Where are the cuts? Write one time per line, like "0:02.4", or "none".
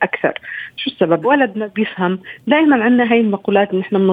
0:01.2